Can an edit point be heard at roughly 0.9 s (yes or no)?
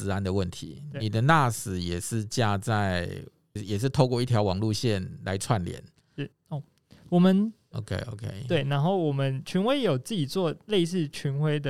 no